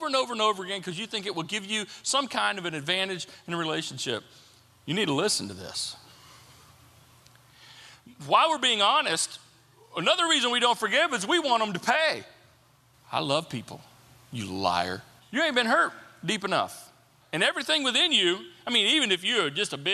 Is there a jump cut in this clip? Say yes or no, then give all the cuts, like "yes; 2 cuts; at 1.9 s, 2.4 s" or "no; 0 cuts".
yes; 3 cuts; at 12.9 s, 15.2 s, 17.2 s